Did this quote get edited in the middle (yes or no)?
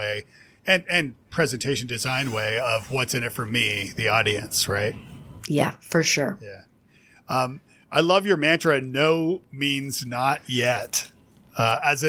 no